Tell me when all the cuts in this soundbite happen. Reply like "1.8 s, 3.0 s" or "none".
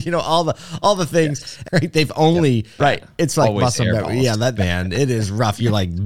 1.6 s, 2.8 s, 4.5 s